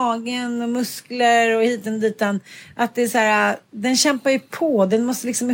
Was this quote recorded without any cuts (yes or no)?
yes